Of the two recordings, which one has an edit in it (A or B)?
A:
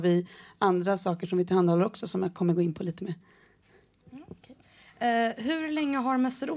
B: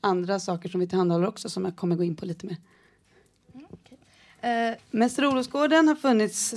B